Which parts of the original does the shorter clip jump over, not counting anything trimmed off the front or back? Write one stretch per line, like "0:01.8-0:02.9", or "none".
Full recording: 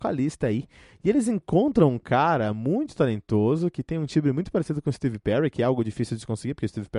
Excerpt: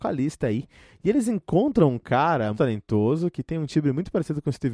0:02.5-0:02.9

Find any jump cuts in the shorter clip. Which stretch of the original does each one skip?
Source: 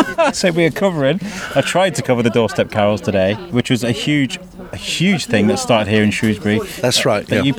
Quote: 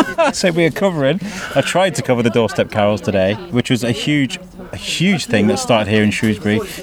none

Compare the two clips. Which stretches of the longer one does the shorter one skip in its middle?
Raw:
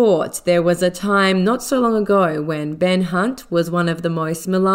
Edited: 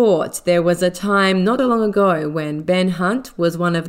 0:01.6-0:01.7

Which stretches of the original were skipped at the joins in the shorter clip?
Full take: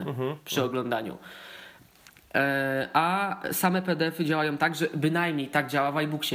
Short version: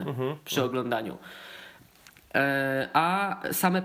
none

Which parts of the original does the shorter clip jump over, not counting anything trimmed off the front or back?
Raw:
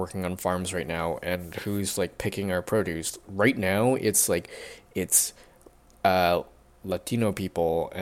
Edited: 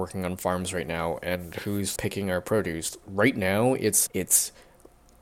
0:02.0-0:02.2
0:04.3-0:04.9

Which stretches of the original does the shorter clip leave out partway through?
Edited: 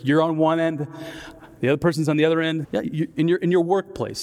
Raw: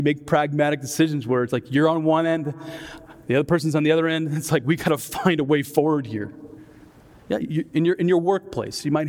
0:04.3-0:07.2

